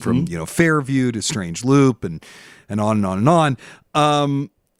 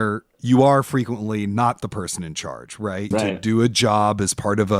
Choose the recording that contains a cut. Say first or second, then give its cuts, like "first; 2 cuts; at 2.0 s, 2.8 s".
second; 1 cut; at 3.1 s